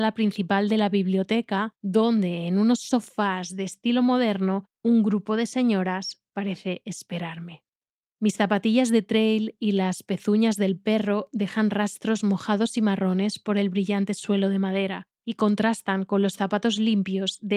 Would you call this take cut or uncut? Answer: uncut